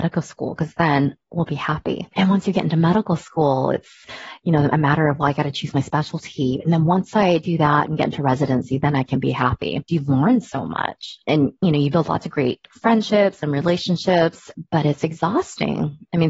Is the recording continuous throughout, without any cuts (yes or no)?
no